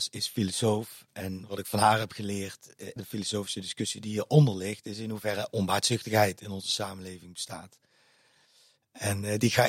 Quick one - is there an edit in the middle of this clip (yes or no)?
yes